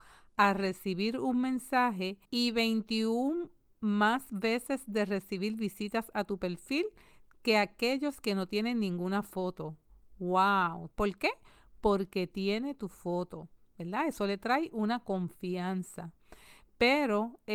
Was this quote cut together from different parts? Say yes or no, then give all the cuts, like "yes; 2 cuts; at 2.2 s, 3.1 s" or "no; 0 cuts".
yes; 2 cuts; at 2.2 s, 10.9 s